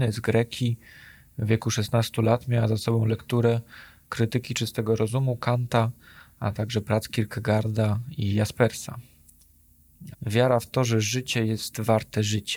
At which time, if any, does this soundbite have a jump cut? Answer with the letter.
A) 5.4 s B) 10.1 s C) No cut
B